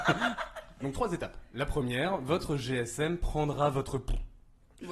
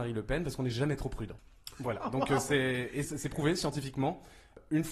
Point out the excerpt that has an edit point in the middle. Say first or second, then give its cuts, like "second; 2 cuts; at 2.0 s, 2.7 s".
second; 1 cut; at 3.0 s